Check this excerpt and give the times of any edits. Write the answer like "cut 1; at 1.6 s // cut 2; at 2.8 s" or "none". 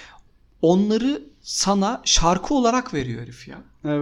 none